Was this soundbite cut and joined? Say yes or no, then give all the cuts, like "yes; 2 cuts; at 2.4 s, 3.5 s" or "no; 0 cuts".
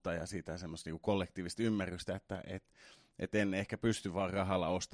no; 0 cuts